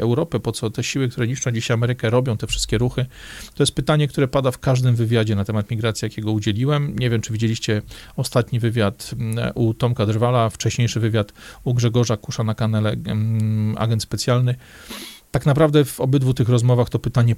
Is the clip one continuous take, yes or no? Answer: yes